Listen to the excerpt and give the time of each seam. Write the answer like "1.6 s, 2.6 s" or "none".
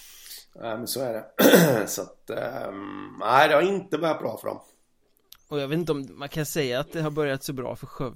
none